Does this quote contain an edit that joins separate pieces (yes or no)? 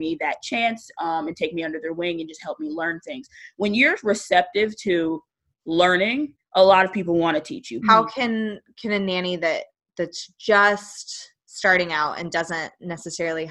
yes